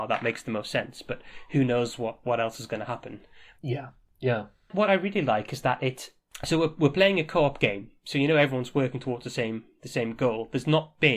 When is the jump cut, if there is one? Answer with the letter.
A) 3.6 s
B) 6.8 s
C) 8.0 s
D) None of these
A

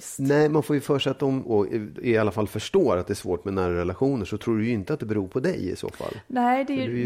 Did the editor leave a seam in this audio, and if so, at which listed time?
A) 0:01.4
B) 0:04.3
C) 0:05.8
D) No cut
A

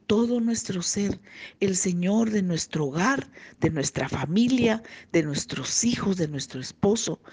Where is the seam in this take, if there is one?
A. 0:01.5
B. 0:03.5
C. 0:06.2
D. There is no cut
D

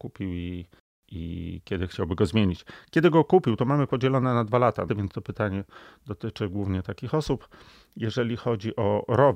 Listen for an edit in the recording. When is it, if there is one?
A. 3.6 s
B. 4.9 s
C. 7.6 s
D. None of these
B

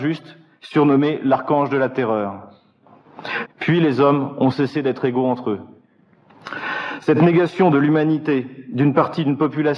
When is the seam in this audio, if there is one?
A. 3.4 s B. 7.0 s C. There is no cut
A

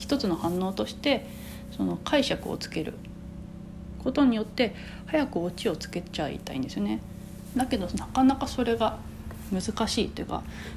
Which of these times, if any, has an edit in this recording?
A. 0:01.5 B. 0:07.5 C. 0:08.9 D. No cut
B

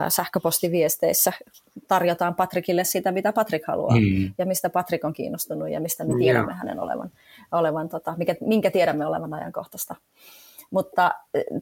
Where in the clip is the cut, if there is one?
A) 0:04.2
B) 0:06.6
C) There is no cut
C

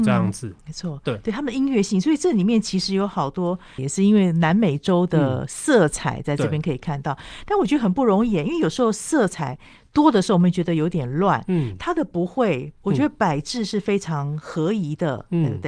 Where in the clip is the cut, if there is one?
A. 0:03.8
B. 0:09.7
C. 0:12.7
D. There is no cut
A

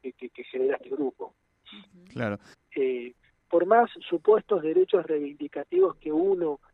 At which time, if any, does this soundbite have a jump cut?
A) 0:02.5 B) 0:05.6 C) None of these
A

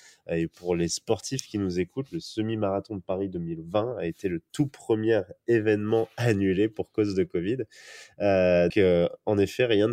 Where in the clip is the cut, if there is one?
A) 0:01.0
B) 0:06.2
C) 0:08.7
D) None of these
C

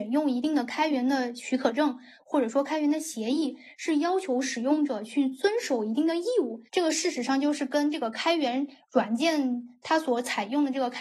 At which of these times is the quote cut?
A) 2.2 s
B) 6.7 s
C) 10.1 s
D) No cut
B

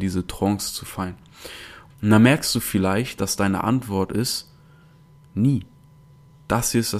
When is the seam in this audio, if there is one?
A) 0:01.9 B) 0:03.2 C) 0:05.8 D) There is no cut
A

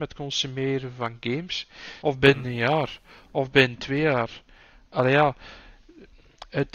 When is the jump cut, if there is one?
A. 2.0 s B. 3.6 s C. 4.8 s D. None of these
A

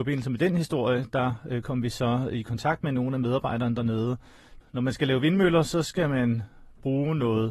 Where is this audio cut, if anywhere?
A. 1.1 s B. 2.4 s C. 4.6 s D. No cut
C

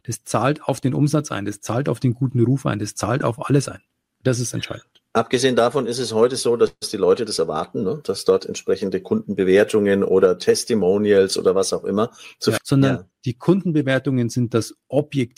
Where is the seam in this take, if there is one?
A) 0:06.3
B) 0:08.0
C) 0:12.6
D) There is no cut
C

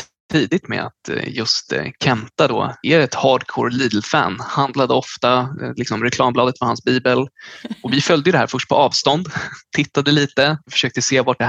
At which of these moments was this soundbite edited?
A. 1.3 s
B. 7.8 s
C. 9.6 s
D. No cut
D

